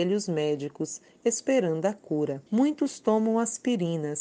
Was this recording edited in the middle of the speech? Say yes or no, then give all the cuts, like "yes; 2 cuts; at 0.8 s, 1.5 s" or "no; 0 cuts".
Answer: yes; 1 cut; at 2.5 s